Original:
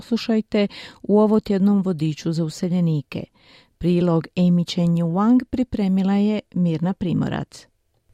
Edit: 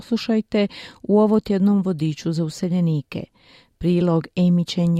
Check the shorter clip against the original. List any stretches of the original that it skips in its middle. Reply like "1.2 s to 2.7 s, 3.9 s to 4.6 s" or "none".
none